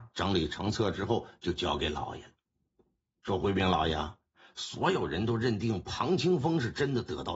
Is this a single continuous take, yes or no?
yes